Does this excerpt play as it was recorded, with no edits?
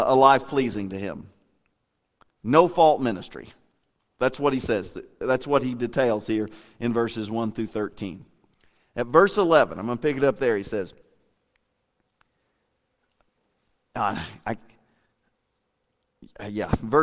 yes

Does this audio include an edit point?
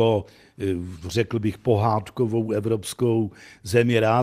no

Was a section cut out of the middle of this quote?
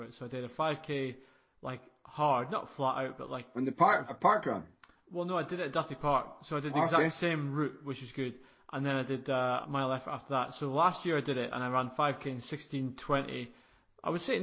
yes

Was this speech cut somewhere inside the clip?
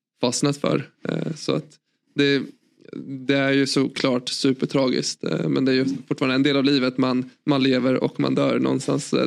no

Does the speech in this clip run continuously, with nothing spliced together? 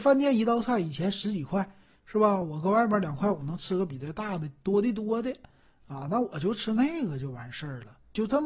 yes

